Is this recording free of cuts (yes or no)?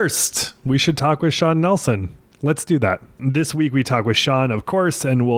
no